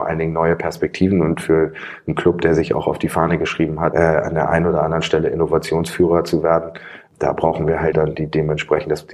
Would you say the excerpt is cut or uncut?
cut